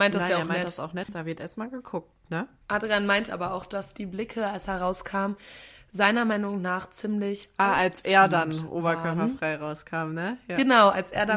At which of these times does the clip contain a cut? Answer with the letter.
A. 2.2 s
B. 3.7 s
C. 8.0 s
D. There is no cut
D